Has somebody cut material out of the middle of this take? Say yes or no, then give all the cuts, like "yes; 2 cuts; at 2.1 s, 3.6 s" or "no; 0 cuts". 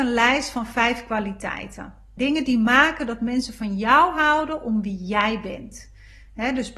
yes; 1 cut; at 2.2 s